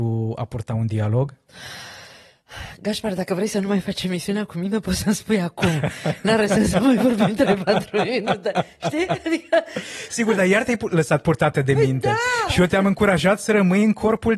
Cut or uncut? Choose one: uncut